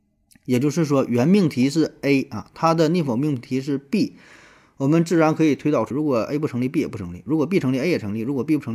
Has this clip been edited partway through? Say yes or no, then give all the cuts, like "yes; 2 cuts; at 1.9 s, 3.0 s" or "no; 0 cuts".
yes; 1 cut; at 5.9 s